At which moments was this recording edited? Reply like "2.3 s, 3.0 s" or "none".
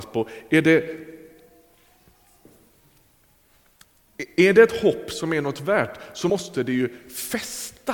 none